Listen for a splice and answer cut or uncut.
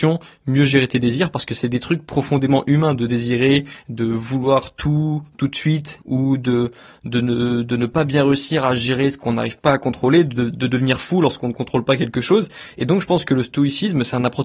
cut